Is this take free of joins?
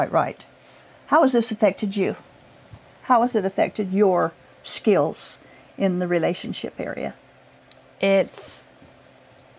yes; 0 cuts

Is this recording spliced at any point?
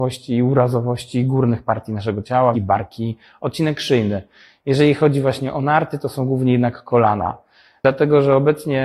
yes; 1 cut; at 2.5 s

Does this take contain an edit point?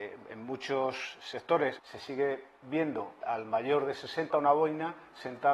yes; 3 cuts; at 1.8 s, 3.2 s, 4.3 s

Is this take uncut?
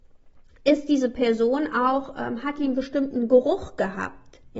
yes; 0 cuts

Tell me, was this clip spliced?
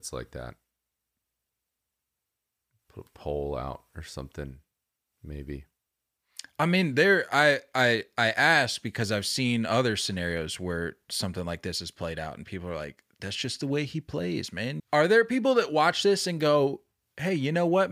yes; 1 cut; at 14.8 s

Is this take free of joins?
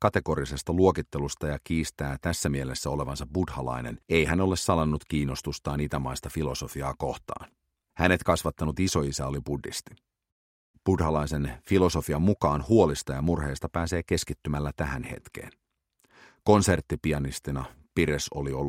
no; 1 cut; at 4.0 s

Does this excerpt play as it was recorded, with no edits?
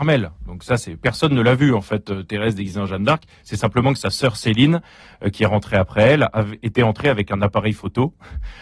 yes; 0 cuts

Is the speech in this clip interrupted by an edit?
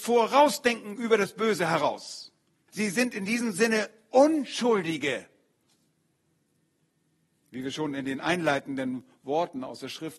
yes; 1 cut; at 2.7 s

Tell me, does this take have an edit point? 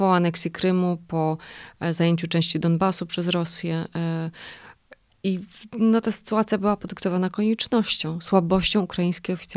no; 0 cuts

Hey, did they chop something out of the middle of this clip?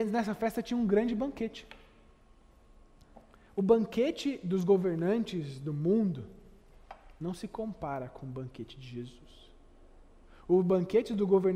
no; 0 cuts

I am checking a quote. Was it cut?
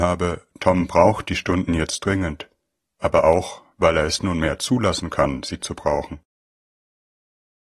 no; 0 cuts

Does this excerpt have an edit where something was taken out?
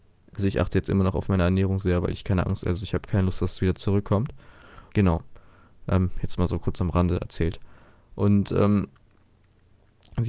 yes; 1 cut; at 4.9 s

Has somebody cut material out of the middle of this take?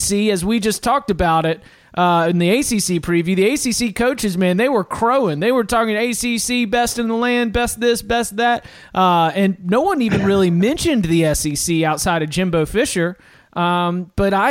no; 0 cuts

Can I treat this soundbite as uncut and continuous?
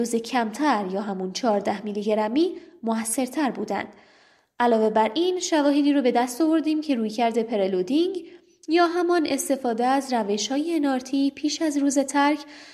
yes; 0 cuts

